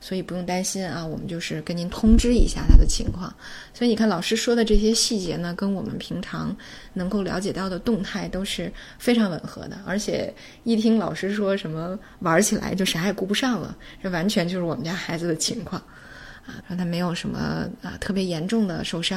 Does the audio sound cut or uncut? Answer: cut